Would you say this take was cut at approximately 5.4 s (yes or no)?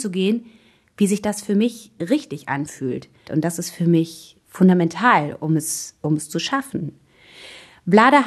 no